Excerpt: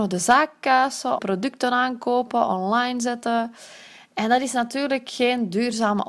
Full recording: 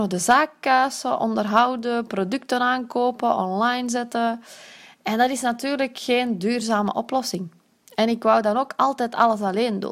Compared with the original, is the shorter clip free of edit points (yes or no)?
no